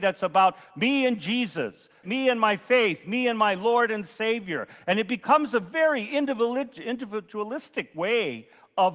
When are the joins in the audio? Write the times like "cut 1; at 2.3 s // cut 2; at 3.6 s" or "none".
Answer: cut 1; at 2.0 s

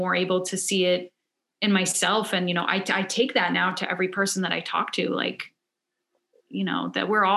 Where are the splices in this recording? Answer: none

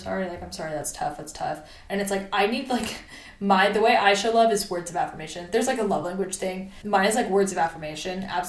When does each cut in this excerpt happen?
cut 1; at 6.8 s

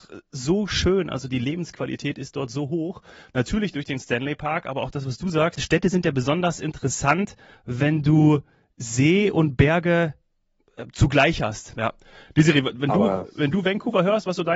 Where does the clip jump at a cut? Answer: cut 1; at 1.3 s // cut 2; at 5.5 s // cut 3; at 11.8 s

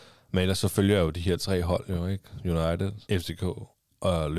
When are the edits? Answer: cut 1; at 3.0 s

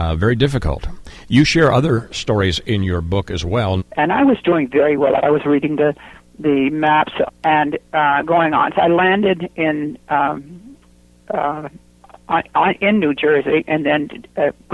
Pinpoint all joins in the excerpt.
cut 1; at 3.8 s // cut 2; at 5.2 s // cut 3; at 7.3 s

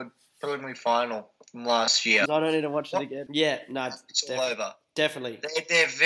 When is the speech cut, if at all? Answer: cut 1; at 2.3 s // cut 2; at 3.3 s

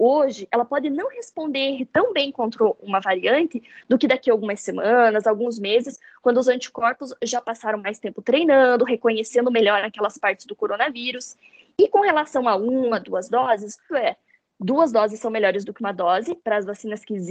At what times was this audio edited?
cut 1; at 1.8 s // cut 2; at 13.9 s // cut 3; at 16.4 s

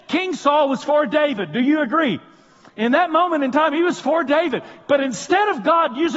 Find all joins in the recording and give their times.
cut 1; at 4.9 s

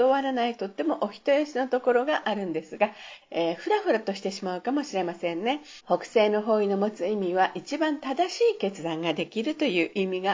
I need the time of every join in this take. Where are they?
cut 1; at 3.2 s // cut 2; at 5.8 s

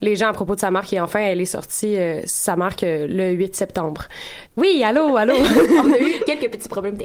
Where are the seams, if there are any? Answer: cut 1; at 4.5 s

